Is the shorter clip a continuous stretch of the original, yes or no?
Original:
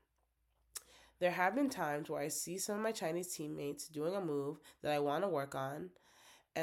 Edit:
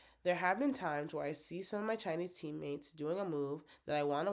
yes